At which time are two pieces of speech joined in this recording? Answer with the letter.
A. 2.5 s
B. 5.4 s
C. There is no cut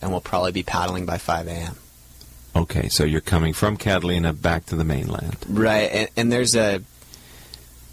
C